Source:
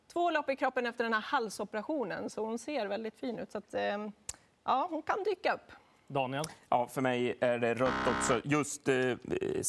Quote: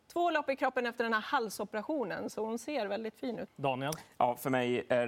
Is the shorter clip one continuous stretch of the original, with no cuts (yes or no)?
no